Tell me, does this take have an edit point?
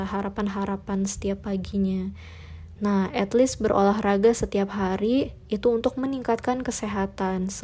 yes; 1 cut; at 2.8 s

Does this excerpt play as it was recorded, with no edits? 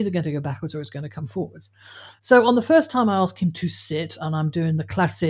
yes; 0 cuts

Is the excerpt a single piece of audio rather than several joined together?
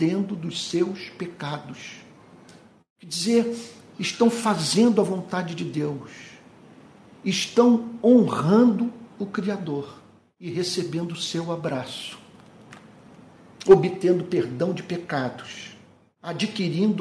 yes; 0 cuts

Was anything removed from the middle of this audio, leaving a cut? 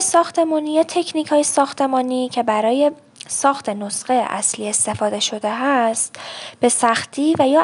no; 0 cuts

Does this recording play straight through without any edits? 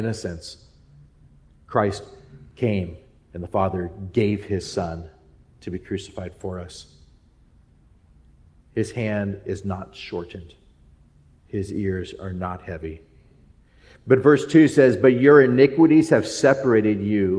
yes; 0 cuts

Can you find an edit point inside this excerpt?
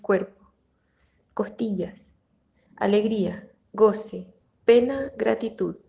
no; 0 cuts

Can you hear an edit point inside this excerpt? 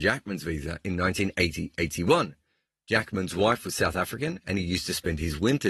no; 0 cuts

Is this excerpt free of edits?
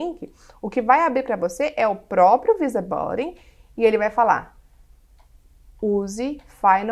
yes; 0 cuts

